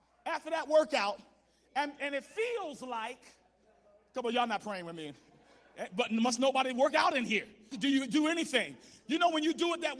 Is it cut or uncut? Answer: cut